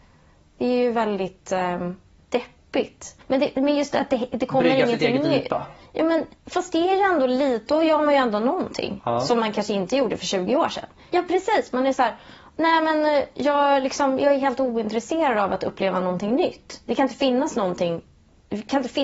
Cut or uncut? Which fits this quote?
cut